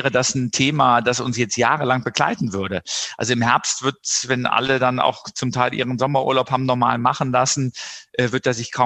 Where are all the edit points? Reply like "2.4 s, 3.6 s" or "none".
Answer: none